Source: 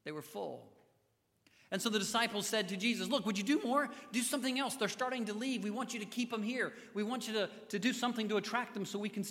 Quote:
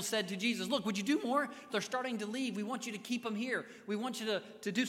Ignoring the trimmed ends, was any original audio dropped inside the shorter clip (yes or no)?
yes